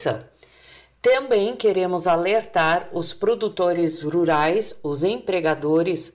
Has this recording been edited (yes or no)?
no